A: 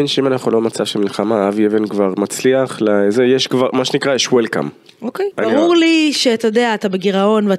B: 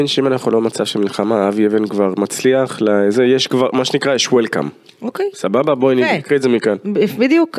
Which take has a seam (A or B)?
A